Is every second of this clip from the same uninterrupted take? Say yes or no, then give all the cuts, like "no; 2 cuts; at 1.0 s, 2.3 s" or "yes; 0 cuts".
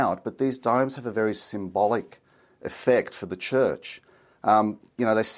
yes; 0 cuts